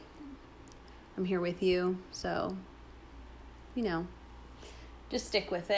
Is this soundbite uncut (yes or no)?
yes